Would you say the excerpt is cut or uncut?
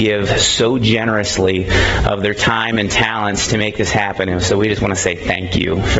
uncut